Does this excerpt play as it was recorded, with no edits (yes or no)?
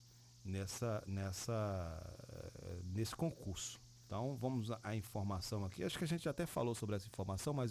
yes